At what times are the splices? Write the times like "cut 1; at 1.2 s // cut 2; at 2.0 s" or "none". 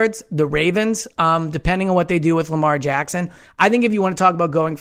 none